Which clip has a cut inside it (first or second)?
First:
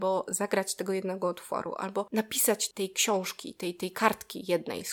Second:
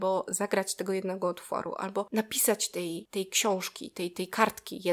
first